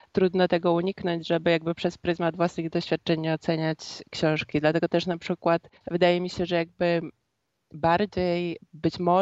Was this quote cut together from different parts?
yes; 1 cut; at 5.8 s

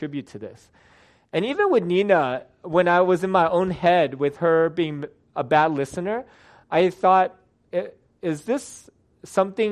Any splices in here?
no; 0 cuts

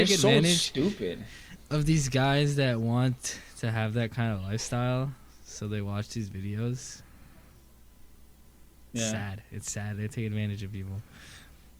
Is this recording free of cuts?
yes; 0 cuts

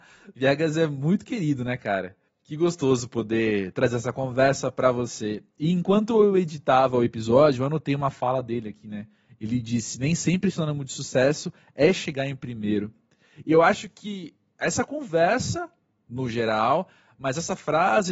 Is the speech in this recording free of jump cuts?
yes; 0 cuts

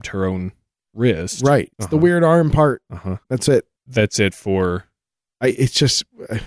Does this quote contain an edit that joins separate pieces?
yes; 2 cuts; at 1.7 s, 3.2 s

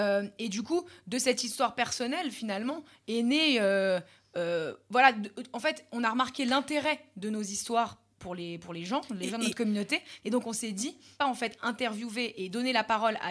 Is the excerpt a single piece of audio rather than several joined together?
no; 1 cut; at 11.2 s

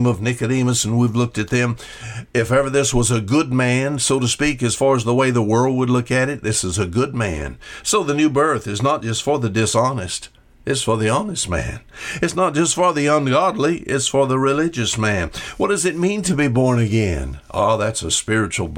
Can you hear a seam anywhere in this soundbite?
no; 0 cuts

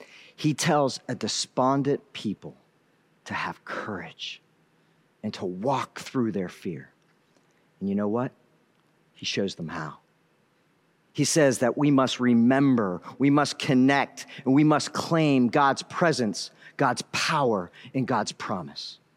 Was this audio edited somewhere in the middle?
no; 0 cuts

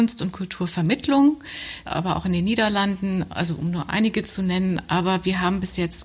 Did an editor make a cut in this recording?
yes; 1 cut; at 1.9 s

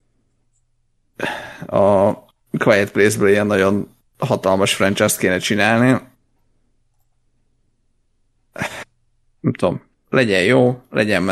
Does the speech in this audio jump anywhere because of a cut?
no; 0 cuts

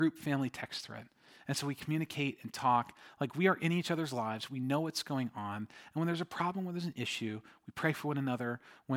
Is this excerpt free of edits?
yes; 0 cuts

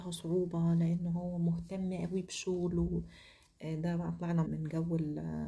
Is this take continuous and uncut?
no; 1 cut; at 4.4 s

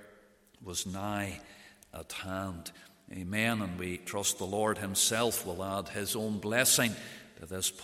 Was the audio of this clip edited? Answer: no; 0 cuts

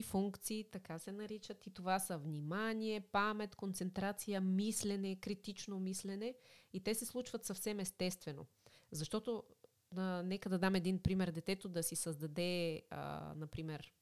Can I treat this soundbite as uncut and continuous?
yes; 0 cuts

